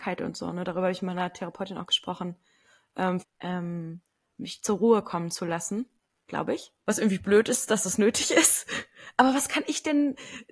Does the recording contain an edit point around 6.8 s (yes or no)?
yes